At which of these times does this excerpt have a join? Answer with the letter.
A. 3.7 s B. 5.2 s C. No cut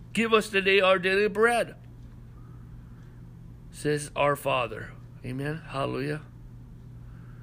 B